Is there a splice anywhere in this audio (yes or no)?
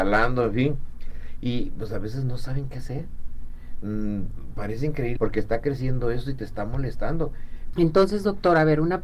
yes